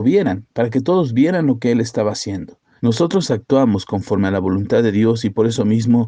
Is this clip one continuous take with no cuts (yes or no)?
no